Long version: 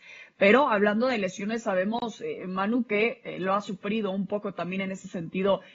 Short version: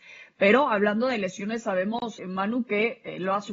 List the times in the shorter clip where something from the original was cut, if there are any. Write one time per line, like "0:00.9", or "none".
0:02.2

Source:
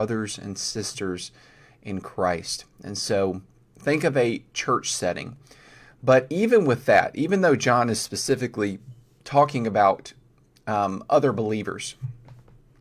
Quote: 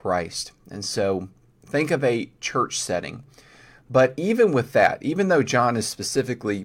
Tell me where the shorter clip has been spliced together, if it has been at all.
none

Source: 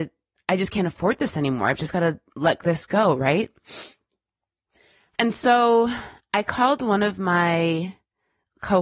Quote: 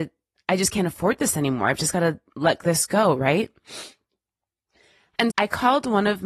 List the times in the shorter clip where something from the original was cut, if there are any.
0:05.3

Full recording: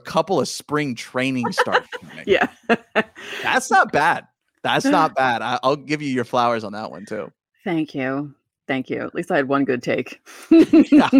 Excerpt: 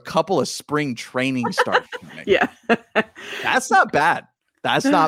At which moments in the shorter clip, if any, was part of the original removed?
none

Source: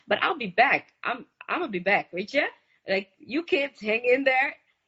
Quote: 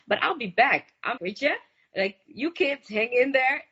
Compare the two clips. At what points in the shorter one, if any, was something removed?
0:01.2

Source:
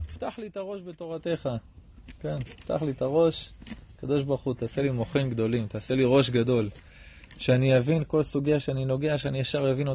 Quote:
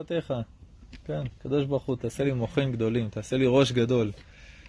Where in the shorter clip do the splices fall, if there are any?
0:01.3

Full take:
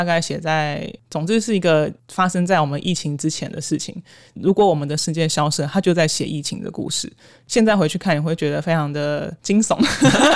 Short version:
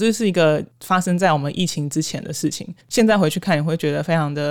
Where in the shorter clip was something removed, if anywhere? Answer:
0:02.8

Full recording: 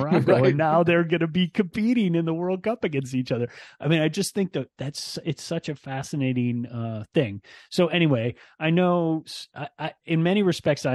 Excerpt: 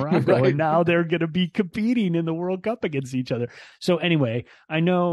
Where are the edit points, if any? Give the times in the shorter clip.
0:03.7

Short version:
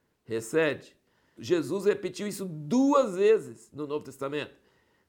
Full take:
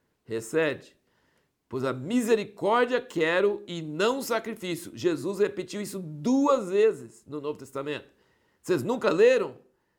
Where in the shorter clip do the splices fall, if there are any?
0:01.4

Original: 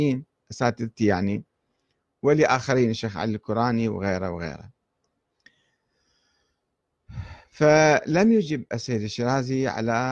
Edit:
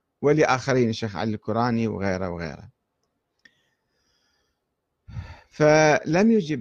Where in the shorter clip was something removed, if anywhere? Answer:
none

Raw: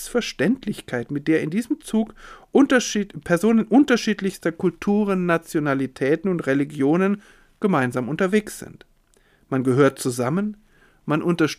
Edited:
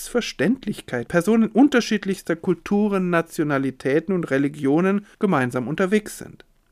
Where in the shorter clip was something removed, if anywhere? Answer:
0:01.1
0:05.1

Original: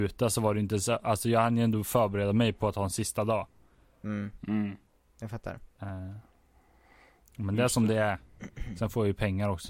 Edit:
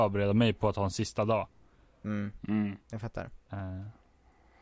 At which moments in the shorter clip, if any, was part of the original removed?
0:02.8

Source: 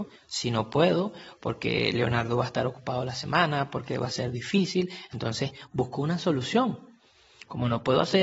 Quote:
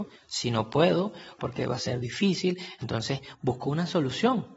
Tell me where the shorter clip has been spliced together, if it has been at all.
0:01.4

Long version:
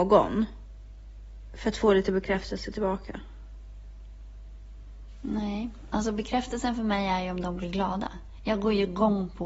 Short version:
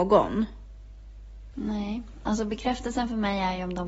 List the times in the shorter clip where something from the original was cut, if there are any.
0:01.5

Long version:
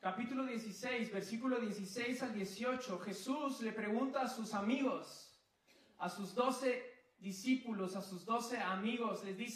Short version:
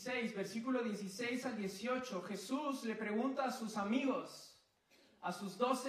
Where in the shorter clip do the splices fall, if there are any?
none

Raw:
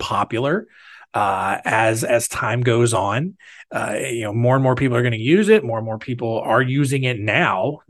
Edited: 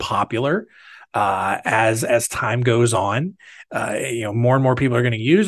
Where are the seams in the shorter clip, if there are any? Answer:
none

